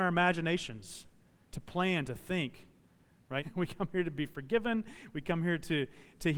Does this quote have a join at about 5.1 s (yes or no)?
no